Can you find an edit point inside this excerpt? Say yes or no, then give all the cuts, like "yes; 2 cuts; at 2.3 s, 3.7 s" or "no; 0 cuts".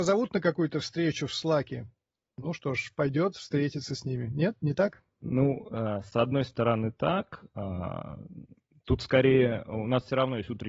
no; 0 cuts